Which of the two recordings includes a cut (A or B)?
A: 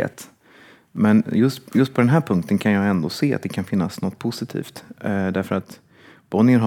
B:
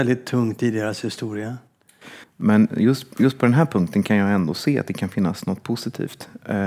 B